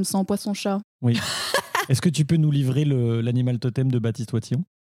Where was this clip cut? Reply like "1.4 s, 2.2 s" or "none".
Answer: 0.9 s